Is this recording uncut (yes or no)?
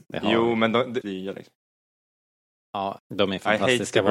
no